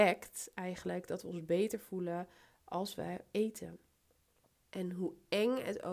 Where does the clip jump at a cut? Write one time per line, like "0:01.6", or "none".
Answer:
0:04.5